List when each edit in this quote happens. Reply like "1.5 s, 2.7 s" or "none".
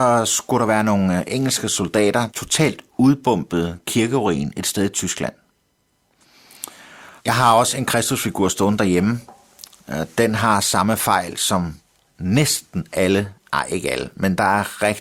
2.3 s, 7.2 s